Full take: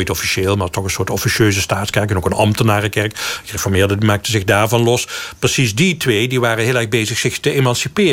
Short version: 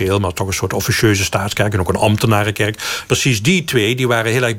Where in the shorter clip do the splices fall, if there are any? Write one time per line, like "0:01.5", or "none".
0:03.1